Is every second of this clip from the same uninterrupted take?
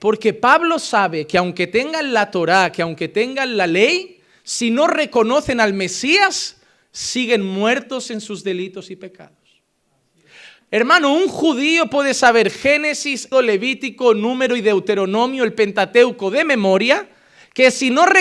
no; 1 cut; at 13.3 s

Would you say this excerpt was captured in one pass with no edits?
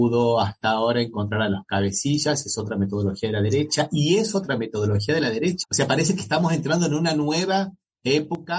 no; 1 cut; at 5.6 s

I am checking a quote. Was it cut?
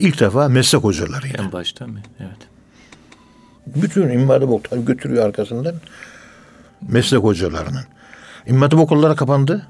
yes; 2 cuts; at 3.6 s, 6.7 s

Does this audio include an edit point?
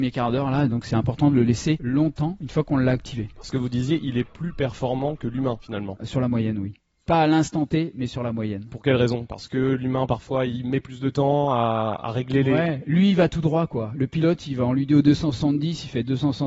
no; 0 cuts

